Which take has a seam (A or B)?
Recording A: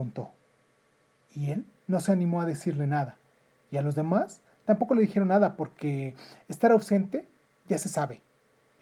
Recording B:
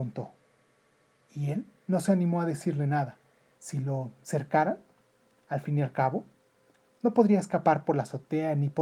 B